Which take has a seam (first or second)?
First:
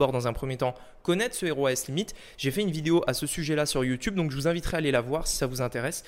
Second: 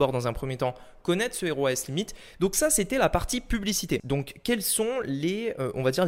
second